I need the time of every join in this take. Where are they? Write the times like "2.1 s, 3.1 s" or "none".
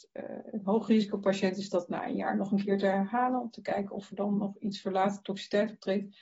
none